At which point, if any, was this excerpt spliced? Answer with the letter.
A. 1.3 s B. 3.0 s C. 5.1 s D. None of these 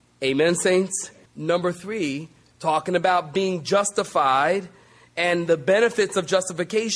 A